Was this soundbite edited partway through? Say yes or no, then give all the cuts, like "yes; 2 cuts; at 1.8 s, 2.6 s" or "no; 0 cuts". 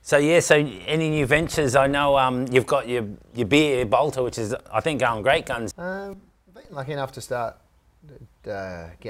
yes; 1 cut; at 5.7 s